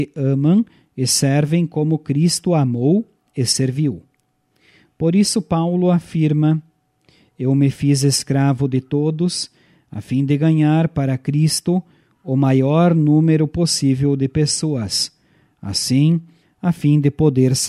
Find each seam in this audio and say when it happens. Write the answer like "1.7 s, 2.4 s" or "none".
16.4 s